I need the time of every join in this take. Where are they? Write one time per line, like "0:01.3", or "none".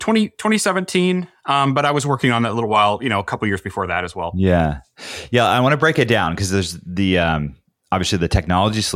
none